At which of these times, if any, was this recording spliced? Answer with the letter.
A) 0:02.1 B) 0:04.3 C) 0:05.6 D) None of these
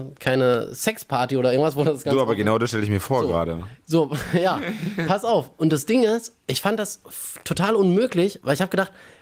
D